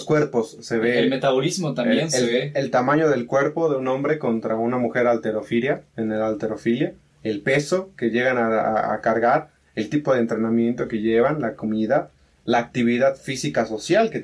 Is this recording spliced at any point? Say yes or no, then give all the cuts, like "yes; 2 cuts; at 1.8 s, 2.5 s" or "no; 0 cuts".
no; 0 cuts